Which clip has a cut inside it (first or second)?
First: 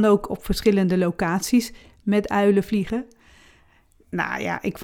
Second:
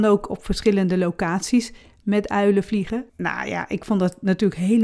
second